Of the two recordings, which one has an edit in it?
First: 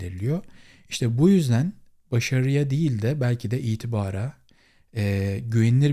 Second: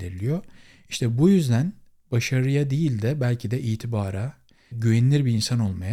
second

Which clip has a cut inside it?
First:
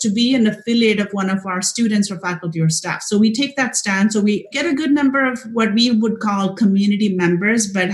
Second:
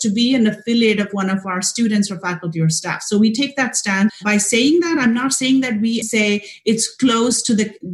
second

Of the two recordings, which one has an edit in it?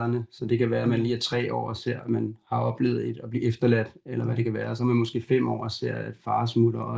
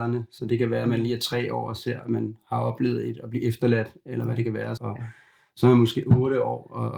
second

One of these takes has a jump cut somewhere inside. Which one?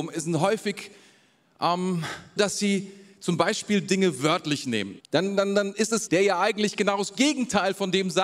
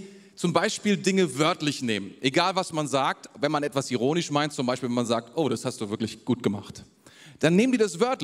first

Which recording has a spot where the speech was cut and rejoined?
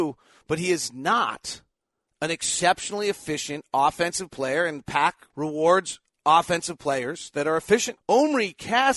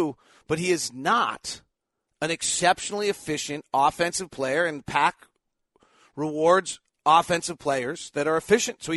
first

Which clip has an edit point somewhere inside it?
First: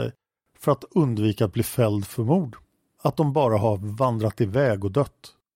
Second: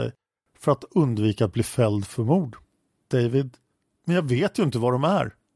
first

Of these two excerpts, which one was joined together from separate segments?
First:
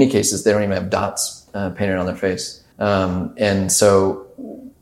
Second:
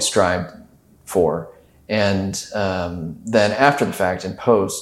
first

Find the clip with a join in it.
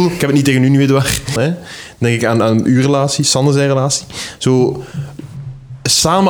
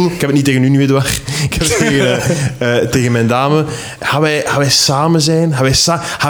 first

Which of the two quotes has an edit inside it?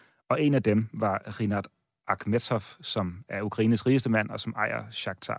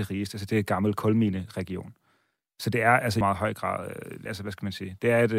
second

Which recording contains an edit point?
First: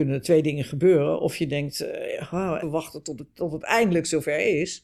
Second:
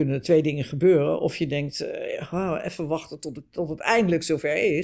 first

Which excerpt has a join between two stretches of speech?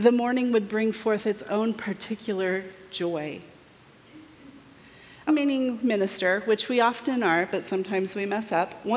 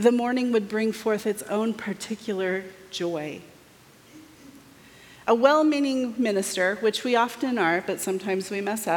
first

